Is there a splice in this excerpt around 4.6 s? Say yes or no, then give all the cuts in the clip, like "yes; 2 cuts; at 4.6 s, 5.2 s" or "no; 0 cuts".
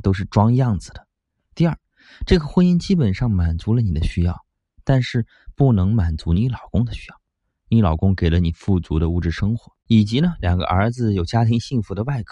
no; 1 cut; at 9.8 s